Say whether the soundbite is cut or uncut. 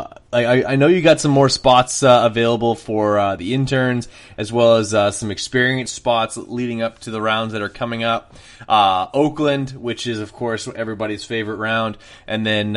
uncut